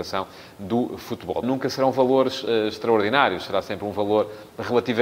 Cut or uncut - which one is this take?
cut